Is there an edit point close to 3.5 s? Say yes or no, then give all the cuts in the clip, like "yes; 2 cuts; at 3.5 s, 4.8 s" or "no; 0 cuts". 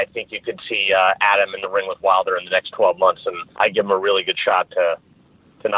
yes; 1 cut; at 3.5 s